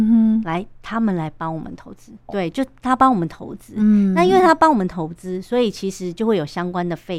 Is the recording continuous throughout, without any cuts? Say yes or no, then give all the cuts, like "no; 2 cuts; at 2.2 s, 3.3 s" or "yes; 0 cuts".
no; 1 cut; at 2.3 s